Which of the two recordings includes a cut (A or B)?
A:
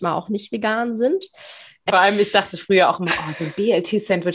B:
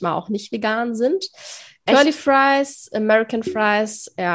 A